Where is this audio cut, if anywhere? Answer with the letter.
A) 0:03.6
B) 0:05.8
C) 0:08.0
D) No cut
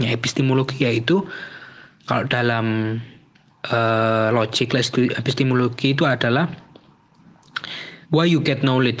C